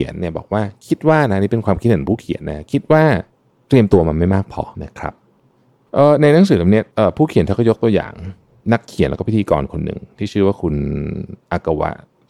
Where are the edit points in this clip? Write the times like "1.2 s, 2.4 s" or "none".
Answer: 4.7 s, 6.9 s